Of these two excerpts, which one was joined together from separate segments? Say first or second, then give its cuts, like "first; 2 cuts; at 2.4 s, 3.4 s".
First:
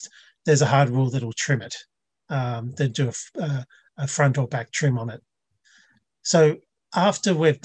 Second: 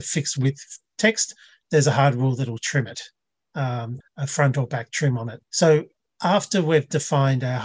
second; 2 cuts; at 4.0 s, 5.5 s